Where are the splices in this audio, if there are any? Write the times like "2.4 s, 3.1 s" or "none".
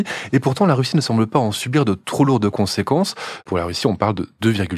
3.4 s